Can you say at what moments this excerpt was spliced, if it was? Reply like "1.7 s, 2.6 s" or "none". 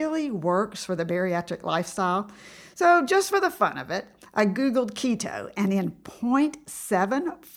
none